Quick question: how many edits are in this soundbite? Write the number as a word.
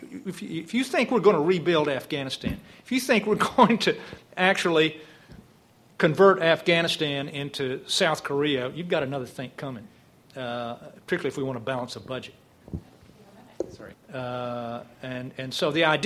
two